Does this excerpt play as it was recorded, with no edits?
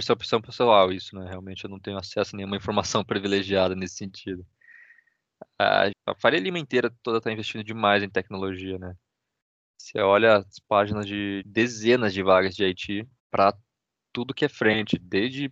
no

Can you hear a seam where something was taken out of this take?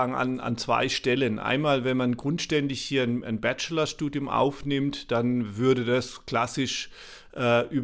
no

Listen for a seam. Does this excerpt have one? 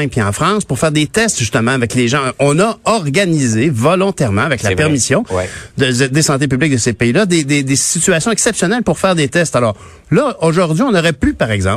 no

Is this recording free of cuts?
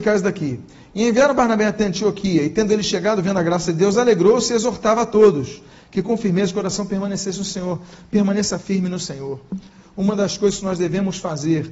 yes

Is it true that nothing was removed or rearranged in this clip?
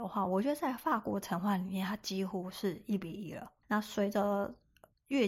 no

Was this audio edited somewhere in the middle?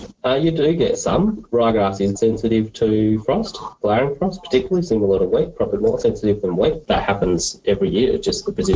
yes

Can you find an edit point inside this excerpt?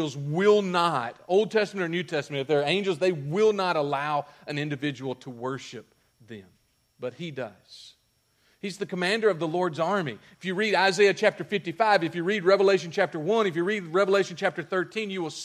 no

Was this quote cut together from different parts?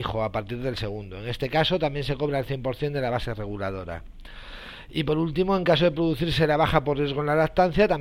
no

